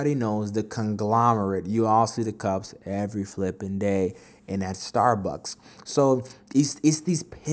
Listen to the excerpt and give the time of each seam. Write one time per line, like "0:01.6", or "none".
none

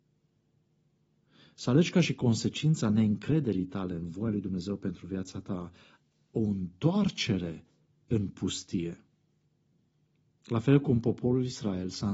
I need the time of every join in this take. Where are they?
none

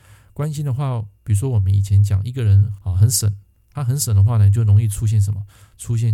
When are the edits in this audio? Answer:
none

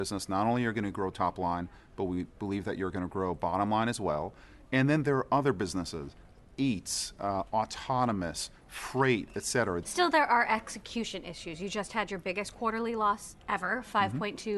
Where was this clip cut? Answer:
0:09.8

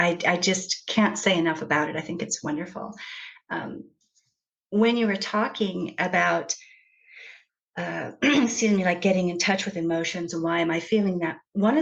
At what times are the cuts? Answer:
none

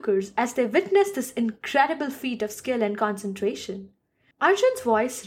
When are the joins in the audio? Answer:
0:04.3

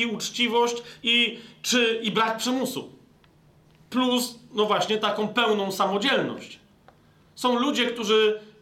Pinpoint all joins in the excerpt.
none

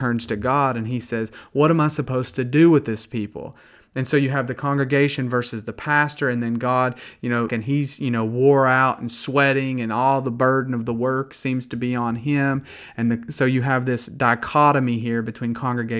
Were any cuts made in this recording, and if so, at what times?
0:07.5

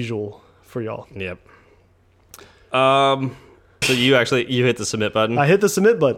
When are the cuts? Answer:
0:03.8

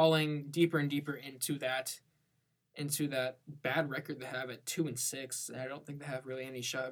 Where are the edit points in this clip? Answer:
none

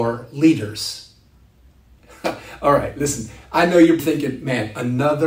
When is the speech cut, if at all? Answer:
0:04.0

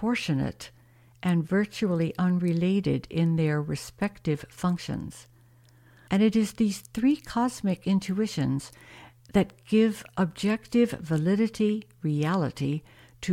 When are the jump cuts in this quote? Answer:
0:06.1

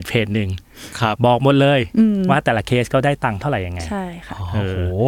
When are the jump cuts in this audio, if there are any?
0:01.1

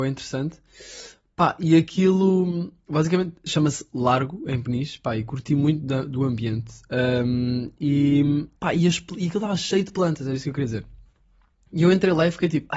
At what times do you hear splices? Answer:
0:08.6

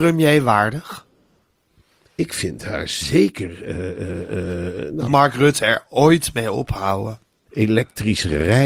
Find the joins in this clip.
0:05.1
0:07.5

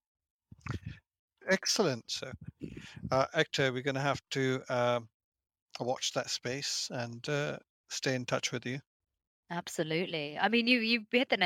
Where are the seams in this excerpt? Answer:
0:02.1

